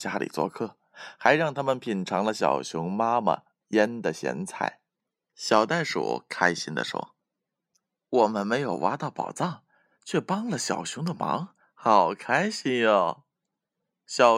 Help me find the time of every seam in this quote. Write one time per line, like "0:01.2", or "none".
0:11.6

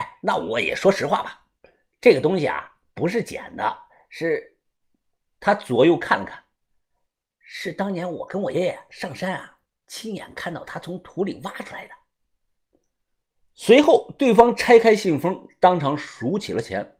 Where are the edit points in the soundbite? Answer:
0:08.5
0:13.4

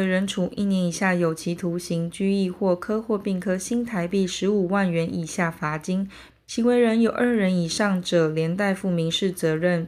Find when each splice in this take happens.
0:06.3

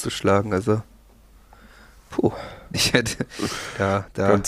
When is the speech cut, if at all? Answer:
0:02.7

